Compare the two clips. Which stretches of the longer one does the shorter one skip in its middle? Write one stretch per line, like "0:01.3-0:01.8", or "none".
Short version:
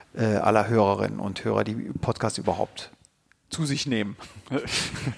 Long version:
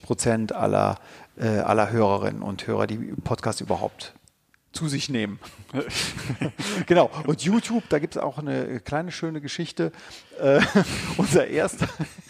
none